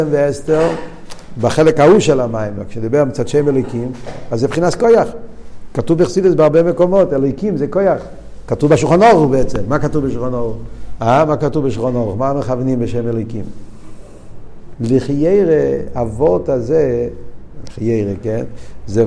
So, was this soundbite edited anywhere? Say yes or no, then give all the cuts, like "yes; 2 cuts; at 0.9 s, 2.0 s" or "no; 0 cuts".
yes; 2 cuts; at 11.0 s, 14.7 s